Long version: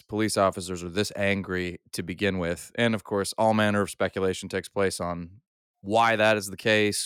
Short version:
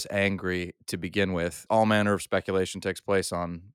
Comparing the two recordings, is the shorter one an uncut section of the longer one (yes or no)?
no